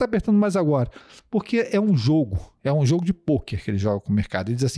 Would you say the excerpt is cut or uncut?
uncut